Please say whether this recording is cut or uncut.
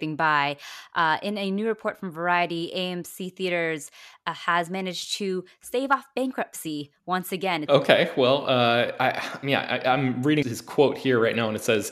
cut